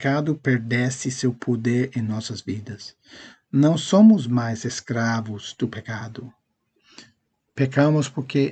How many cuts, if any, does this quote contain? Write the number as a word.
zero